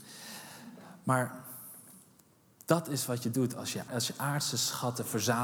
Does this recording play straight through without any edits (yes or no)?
no